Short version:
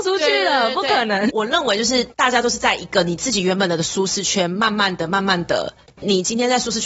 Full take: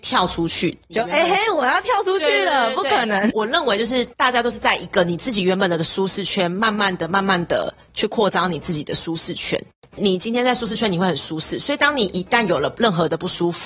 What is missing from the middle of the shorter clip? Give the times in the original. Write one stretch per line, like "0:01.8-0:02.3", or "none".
0:07.9-0:09.8